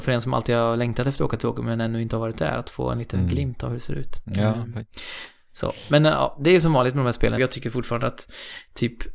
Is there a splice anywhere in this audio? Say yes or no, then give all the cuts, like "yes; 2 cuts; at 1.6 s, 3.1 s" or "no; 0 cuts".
yes; 1 cut; at 7.4 s